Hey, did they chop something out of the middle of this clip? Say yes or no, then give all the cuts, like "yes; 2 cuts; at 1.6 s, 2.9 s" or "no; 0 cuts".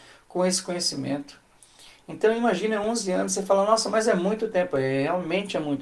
no; 0 cuts